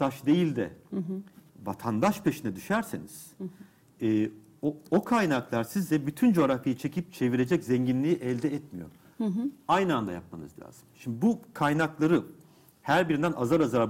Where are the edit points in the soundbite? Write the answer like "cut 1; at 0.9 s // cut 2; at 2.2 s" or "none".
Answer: cut 1; at 3.9 s

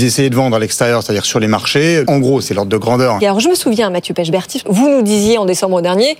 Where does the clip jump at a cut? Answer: cut 1; at 2.0 s // cut 2; at 3.2 s // cut 3; at 4.6 s

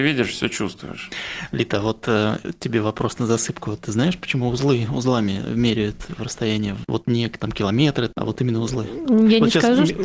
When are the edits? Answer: none

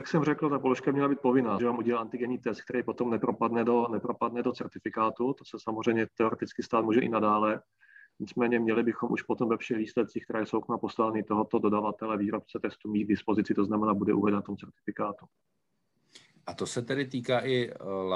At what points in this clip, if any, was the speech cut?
cut 1; at 1.6 s

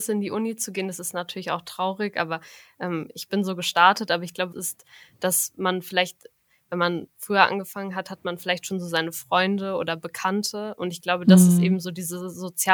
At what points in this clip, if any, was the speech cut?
cut 1; at 4.5 s

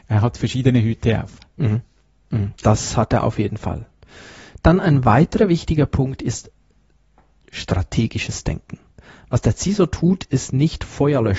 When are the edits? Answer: none

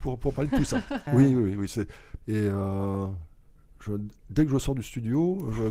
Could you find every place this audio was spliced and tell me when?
cut 1; at 1.1 s // cut 2; at 2.2 s

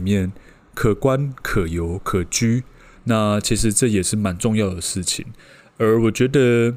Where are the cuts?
cut 1; at 3.0 s

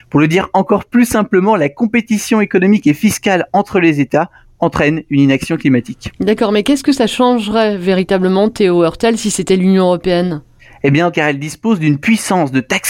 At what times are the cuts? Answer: cut 1; at 11.1 s

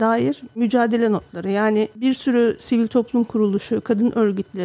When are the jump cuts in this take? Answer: none

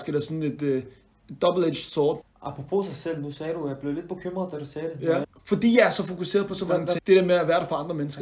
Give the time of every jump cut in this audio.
cut 1; at 2.2 s // cut 2; at 5.2 s // cut 3; at 7.0 s

